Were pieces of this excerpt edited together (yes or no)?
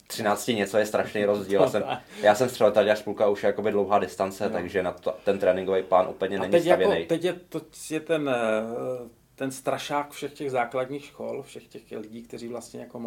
no